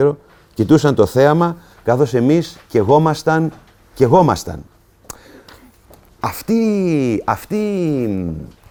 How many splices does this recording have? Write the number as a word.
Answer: zero